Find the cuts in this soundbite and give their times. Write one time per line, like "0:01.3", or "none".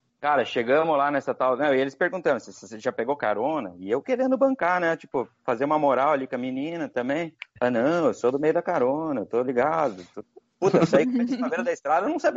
none